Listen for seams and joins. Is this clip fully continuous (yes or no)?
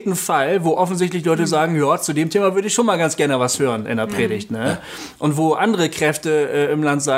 yes